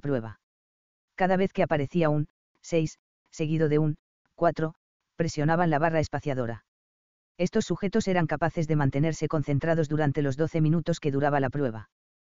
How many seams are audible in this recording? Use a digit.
0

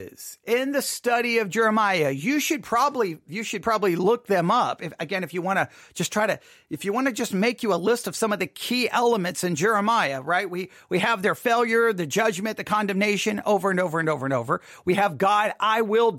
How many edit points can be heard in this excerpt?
0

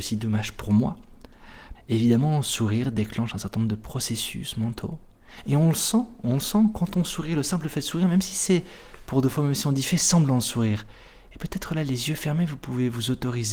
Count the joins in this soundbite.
1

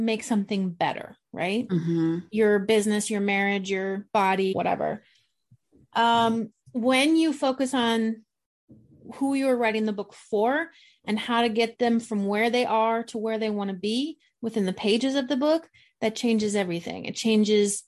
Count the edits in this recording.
2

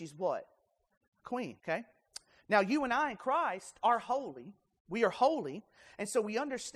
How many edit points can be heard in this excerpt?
1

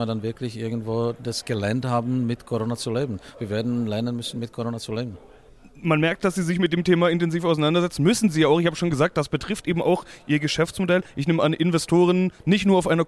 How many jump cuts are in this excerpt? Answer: 1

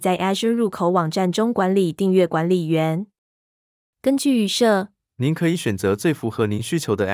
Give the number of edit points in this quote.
1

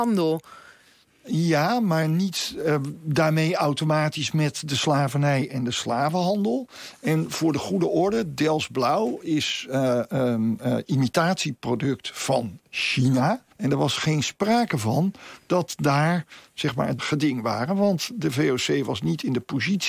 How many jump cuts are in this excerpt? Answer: 2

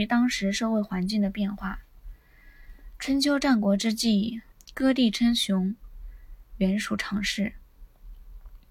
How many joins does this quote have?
2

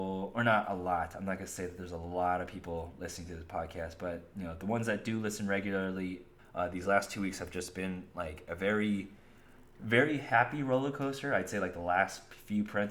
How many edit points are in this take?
1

